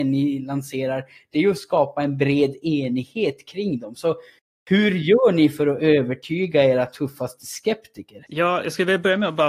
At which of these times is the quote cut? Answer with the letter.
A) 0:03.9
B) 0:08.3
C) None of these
B